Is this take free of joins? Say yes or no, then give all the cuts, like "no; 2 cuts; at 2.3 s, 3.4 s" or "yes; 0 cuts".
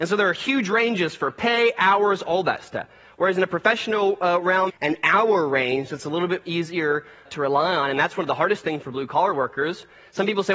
no; 2 cuts; at 4.7 s, 7.2 s